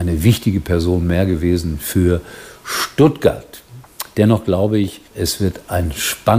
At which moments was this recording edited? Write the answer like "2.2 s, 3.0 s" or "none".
5.1 s